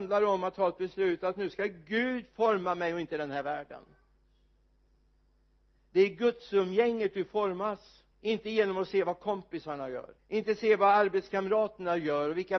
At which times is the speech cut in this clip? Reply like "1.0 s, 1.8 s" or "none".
8.1 s, 10.2 s

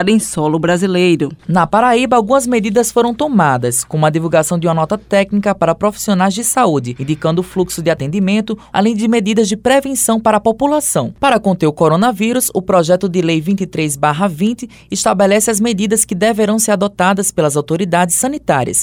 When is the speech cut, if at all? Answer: 8.7 s, 11.1 s

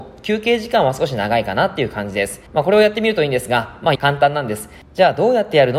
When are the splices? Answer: 2.5 s, 4.0 s

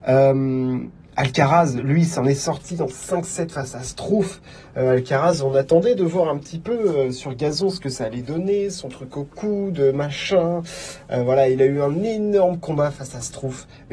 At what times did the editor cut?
none

